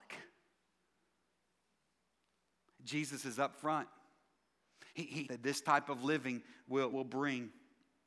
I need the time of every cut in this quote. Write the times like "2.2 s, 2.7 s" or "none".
5.2 s, 6.9 s